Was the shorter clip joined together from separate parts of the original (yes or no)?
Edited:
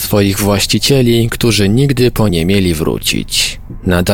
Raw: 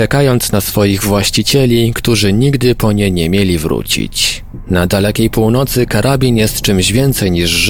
yes